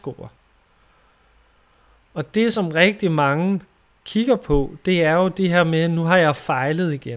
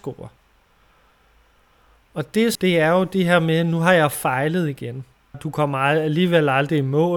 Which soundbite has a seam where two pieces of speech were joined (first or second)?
second